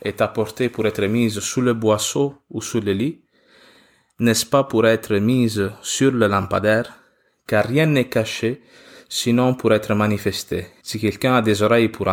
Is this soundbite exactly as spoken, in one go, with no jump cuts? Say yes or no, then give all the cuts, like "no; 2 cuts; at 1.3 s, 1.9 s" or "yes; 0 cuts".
no; 1 cut; at 10.8 s